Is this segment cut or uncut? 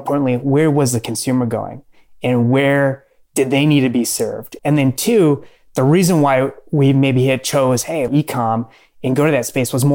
cut